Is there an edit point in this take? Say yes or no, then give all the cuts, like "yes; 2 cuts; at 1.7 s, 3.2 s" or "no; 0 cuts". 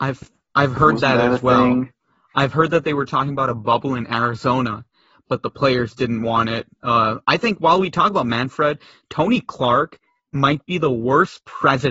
no; 0 cuts